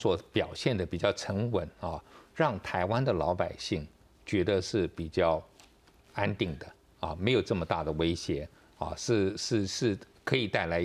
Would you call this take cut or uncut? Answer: uncut